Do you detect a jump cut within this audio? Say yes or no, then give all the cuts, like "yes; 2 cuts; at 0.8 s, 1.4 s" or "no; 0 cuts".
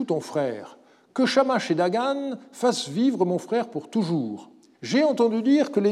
yes; 1 cut; at 4.7 s